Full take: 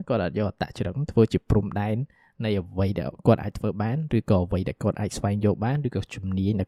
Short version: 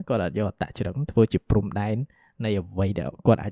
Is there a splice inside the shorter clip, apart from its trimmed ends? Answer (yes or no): no